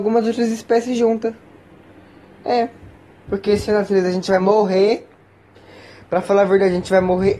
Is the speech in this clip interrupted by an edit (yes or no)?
yes